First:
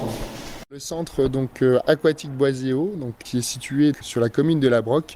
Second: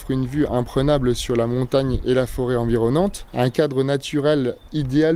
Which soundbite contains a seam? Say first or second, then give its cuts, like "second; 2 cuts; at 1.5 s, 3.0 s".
first; 1 cut; at 3.9 s